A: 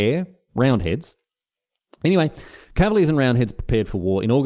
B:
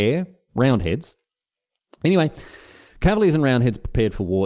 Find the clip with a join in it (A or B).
A